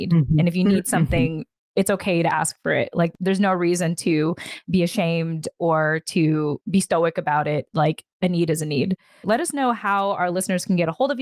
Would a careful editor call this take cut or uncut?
cut